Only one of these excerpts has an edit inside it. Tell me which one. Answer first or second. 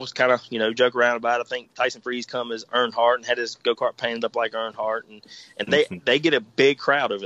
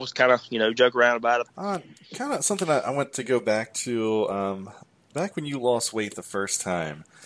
second